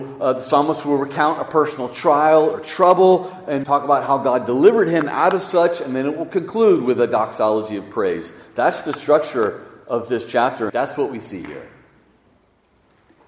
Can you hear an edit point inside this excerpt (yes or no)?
yes